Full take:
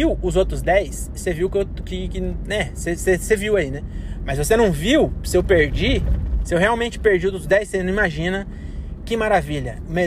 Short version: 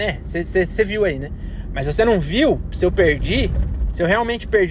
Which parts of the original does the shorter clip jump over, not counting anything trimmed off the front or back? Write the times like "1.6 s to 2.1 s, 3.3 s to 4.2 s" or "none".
none